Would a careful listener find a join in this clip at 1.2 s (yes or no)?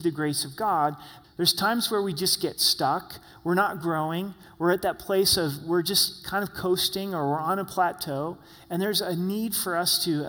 yes